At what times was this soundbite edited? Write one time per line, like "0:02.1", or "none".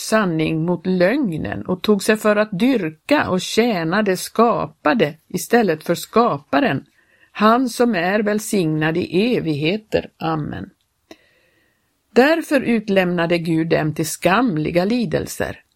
none